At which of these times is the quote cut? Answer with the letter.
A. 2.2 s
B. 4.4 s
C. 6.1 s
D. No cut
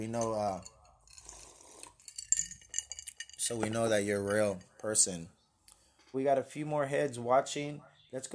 C